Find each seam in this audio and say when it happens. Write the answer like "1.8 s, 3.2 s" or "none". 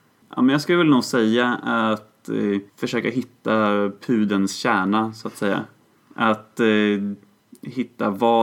2.7 s